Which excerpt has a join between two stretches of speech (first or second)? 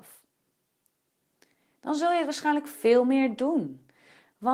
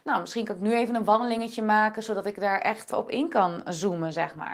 second